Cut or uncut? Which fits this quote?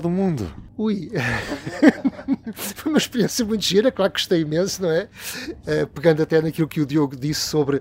uncut